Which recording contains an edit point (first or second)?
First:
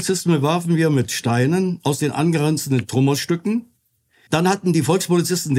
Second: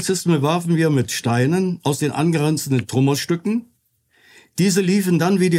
first